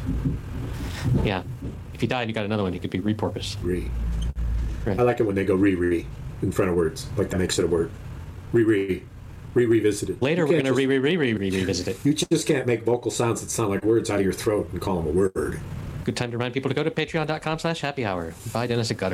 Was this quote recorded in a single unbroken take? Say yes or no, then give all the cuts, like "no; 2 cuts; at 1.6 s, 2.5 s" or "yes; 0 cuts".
no; 2 cuts; at 10.2 s, 16.0 s